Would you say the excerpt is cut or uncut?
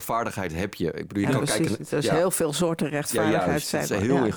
uncut